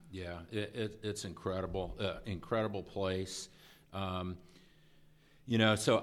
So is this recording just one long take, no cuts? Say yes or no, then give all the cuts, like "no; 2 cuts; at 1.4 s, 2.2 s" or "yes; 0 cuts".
yes; 0 cuts